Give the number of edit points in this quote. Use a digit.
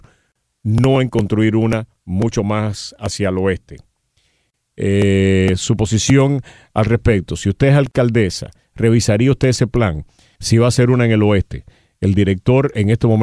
1